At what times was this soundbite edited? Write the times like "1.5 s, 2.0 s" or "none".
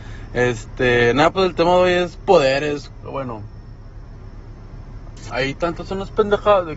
3.0 s